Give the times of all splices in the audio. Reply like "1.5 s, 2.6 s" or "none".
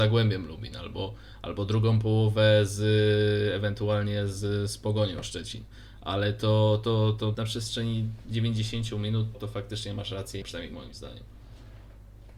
7.3 s, 9.3 s, 10.4 s